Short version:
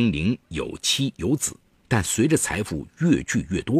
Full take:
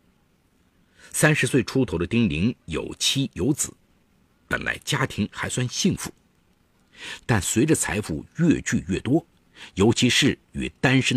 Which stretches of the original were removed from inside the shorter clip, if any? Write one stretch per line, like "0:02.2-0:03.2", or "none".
0:04.0-0:07.2